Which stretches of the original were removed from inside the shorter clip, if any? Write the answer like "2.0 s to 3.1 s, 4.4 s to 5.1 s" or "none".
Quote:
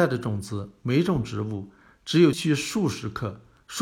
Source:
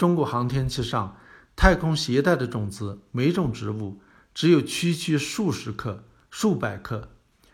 4.6 s to 5.0 s